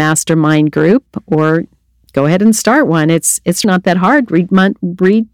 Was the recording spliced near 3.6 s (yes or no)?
yes